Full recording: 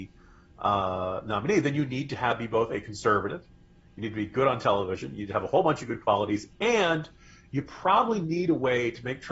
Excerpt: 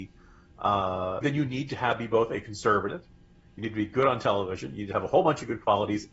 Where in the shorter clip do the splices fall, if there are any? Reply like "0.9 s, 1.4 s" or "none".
1.2 s